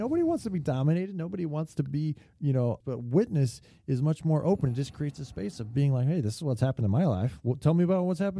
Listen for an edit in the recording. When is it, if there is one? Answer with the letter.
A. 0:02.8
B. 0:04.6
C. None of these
A